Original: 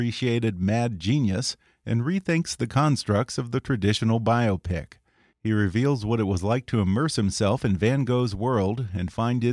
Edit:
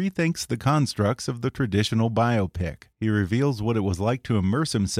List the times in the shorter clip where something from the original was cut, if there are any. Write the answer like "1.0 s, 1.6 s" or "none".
2.9 s

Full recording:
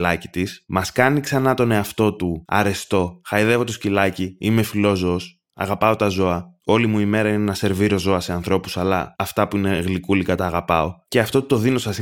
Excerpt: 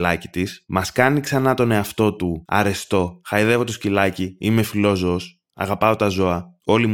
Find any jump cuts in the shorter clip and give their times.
none

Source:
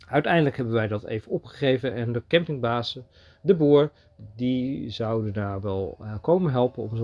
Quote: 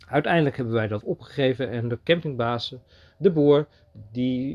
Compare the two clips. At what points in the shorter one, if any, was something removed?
1.0 s

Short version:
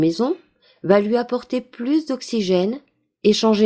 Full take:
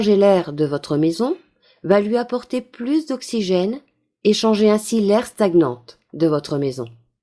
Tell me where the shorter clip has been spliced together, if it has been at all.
none

